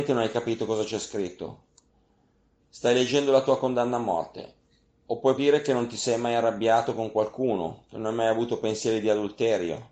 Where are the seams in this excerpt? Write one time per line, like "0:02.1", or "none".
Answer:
0:05.4